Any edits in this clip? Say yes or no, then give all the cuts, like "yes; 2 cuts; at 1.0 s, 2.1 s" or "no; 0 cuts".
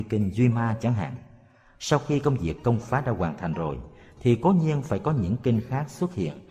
no; 0 cuts